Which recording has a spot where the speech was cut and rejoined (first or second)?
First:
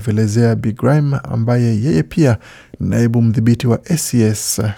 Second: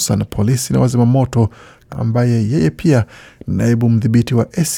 second